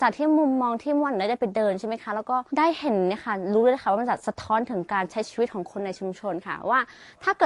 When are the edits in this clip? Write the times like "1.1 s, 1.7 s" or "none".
2.5 s